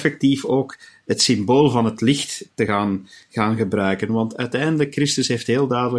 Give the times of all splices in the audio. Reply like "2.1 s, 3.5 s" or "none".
none